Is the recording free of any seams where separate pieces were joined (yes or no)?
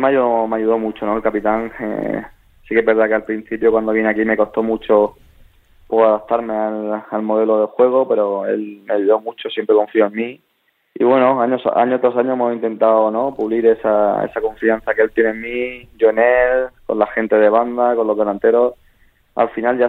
yes